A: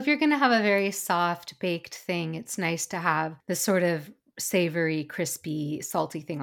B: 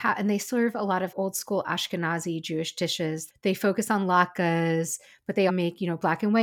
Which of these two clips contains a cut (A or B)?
B